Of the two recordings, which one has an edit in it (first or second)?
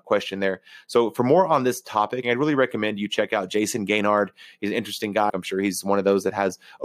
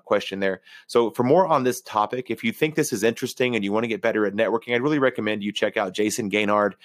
first